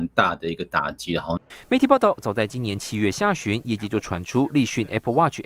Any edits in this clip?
no; 0 cuts

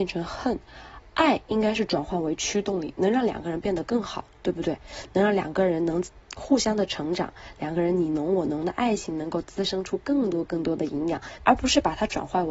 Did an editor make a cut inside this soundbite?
yes; 1 cut; at 11.4 s

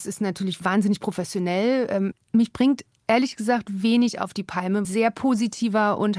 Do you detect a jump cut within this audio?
yes; 2 cuts; at 2.1 s, 4.8 s

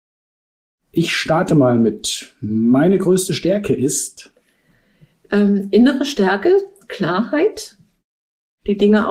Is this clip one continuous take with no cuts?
yes; 0 cuts

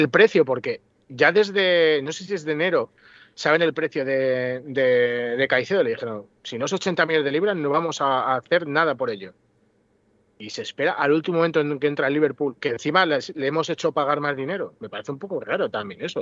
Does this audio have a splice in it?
no; 0 cuts

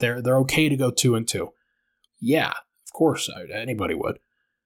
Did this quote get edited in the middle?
yes; 1 cut; at 2.1 s

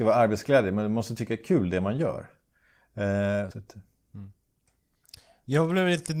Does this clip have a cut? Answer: yes; 1 cut; at 3.5 s

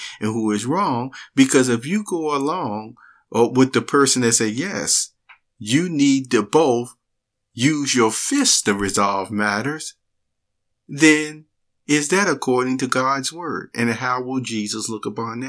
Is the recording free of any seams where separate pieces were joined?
yes; 0 cuts

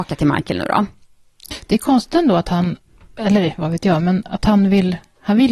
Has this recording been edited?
no; 0 cuts

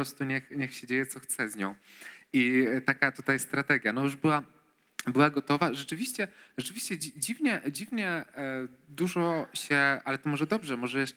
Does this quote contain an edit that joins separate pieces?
no; 0 cuts

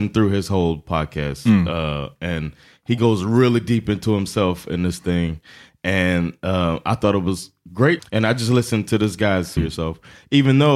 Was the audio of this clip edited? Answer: yes; 2 cuts; at 8.0 s, 9.6 s

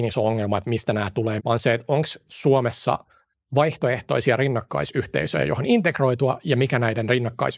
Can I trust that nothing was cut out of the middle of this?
no; 1 cut; at 1.4 s

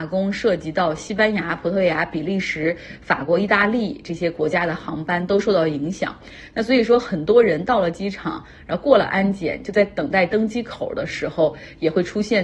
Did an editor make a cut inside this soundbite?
no; 0 cuts

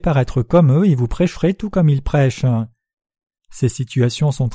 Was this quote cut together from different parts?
no; 0 cuts

